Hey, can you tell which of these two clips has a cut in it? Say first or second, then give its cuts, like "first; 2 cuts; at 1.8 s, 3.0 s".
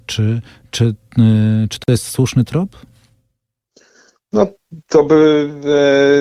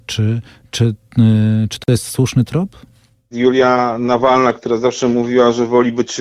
second; 1 cut; at 3.3 s